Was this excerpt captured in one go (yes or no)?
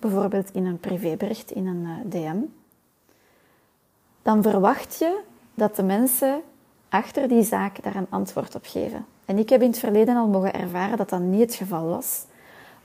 yes